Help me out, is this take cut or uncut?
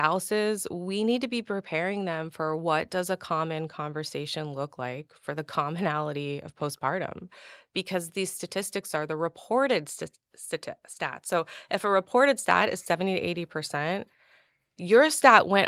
uncut